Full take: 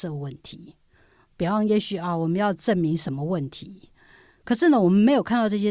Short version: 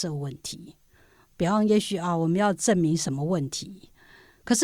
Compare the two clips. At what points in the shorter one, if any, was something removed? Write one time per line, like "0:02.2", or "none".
none